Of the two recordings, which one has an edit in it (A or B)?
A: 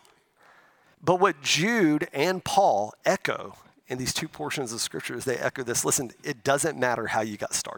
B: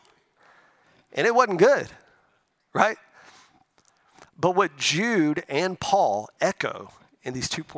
A